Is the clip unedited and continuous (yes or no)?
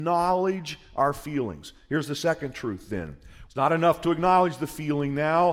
no